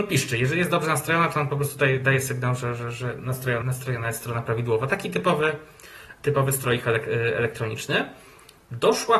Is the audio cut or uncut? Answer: cut